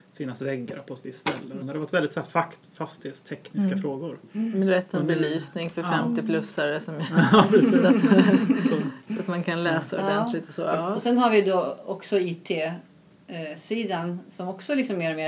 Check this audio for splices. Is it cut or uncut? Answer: cut